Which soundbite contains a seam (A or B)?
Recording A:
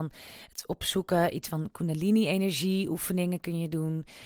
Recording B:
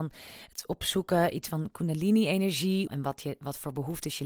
B